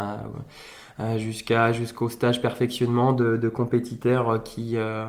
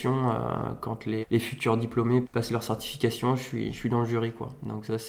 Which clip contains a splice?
second; 2 cuts; at 1.2 s, 2.2 s

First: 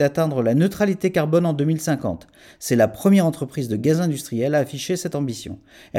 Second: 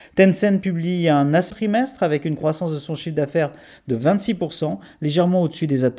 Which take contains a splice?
second; 1 cut; at 1.5 s

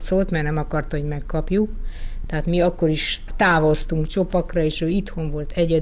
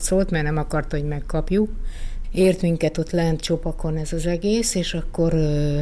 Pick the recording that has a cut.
second; 1 cut; at 2.2 s

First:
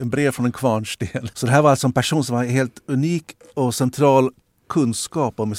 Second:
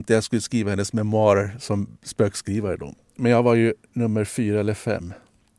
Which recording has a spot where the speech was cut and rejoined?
first; 1 cut; at 1.3 s

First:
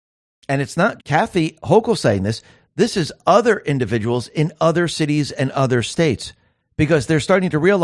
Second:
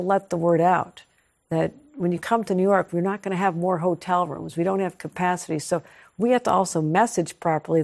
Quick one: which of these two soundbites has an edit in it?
first; 1 cut; at 1.0 s

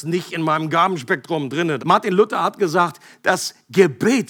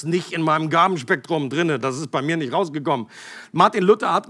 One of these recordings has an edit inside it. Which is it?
first; 1 cut; at 1.8 s

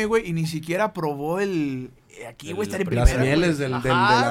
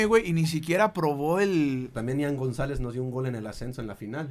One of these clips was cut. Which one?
second; 1 cut; at 1.9 s

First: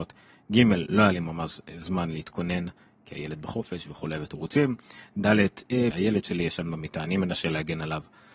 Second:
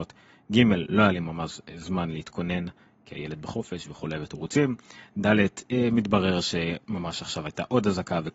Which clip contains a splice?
first; 1 cut; at 5.9 s

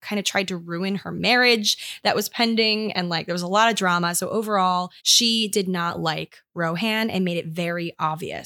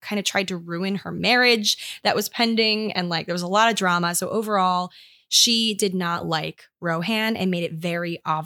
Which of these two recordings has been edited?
first; 1 cut; at 5.0 s

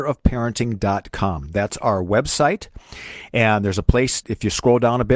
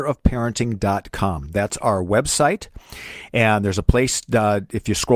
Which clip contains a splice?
first; 1 cut; at 4.2 s

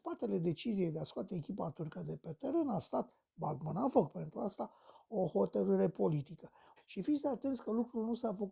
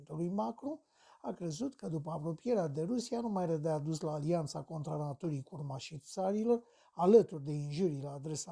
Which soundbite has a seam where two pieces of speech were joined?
first; 1 cut; at 6.8 s

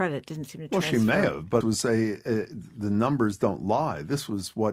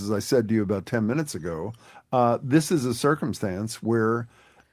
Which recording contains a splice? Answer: first; 1 cut; at 1.6 s

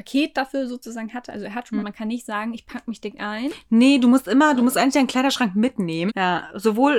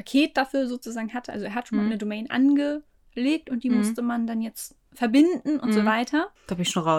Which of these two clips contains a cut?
first; 2 cuts; at 1.8 s, 6.1 s

